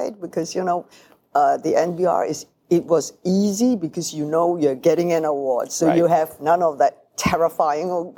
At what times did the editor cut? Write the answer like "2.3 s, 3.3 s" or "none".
none